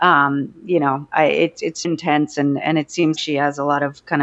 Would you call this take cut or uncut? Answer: cut